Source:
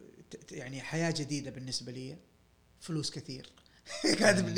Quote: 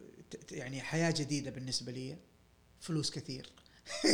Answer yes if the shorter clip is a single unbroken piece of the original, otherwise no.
yes